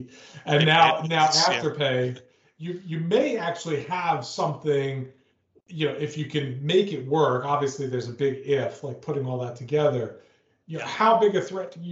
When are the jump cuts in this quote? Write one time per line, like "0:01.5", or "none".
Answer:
none